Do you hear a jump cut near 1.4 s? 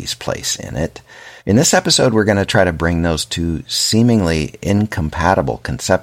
yes; 1 cut; at 1.4 s

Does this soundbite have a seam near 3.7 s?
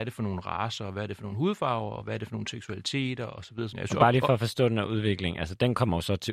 yes; 1 cut; at 3.7 s

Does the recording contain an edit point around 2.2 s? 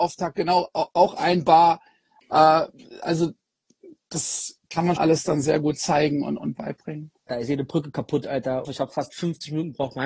no; 3 cuts; at 5.0 s, 7.3 s, 8.6 s

